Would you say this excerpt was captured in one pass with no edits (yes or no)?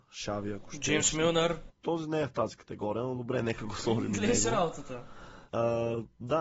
no